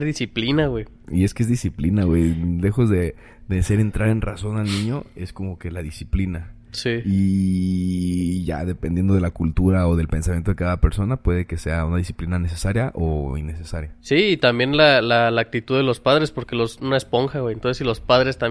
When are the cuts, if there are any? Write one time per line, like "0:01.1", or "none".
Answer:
0:14.0
0:16.8